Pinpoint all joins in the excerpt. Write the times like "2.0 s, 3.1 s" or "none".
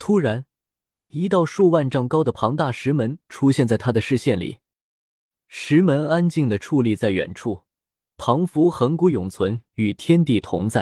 1.1 s